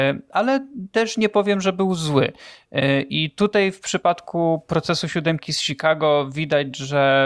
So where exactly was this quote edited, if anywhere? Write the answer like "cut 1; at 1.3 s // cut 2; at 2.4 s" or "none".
none